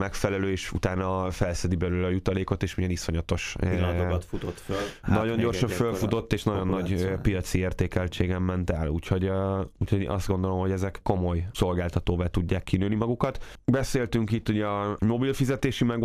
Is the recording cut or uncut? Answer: uncut